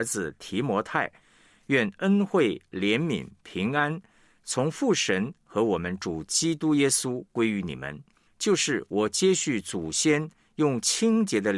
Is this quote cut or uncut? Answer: cut